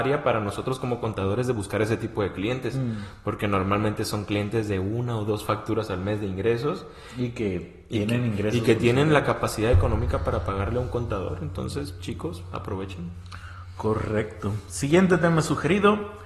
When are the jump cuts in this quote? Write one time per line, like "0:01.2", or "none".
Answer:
none